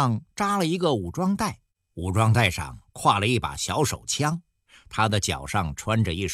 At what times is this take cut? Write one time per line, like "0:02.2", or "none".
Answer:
none